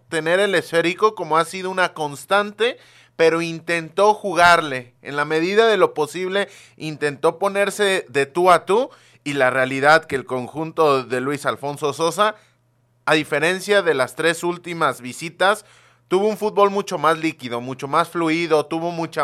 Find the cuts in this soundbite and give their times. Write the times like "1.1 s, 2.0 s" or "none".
none